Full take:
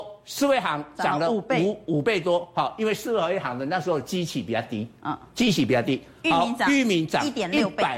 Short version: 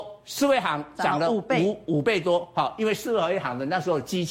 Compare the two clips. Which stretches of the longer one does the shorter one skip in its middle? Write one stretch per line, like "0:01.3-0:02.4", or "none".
none